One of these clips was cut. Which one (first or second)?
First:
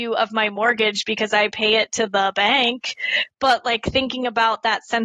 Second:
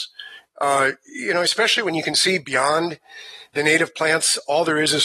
second